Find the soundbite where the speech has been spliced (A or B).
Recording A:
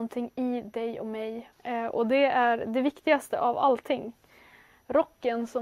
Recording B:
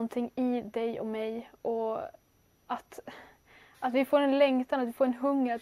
A